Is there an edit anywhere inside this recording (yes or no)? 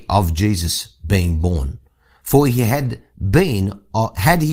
no